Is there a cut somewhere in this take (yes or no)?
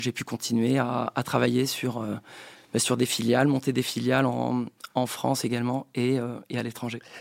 no